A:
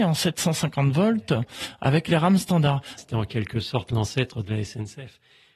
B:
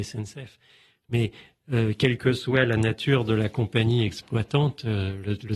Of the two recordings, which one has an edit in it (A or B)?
A